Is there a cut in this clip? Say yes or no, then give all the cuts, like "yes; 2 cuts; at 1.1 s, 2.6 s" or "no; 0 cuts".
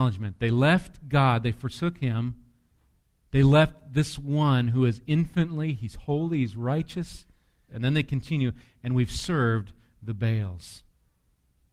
yes; 1 cut; at 7.7 s